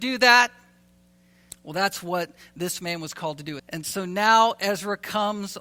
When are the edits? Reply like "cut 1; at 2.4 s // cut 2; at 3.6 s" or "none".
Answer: cut 1; at 1.5 s // cut 2; at 3.6 s